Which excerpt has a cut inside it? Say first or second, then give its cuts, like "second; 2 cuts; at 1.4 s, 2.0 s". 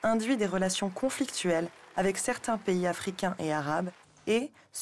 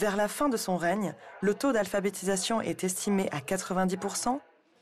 second; 1 cut; at 1.4 s